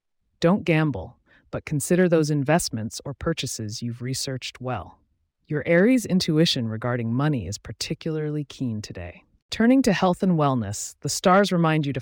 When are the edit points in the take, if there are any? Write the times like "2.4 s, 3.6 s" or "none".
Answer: none